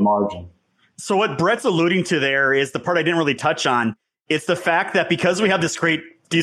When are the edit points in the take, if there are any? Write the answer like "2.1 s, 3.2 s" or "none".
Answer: none